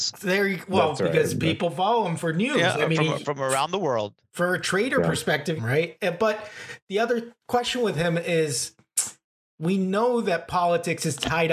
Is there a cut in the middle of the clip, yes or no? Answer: yes